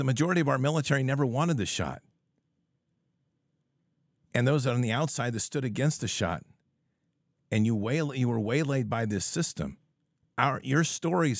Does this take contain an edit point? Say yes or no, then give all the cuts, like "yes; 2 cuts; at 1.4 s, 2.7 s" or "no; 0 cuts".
no; 0 cuts